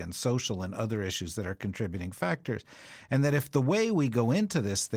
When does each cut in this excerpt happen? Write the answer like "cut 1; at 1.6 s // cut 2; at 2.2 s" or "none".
none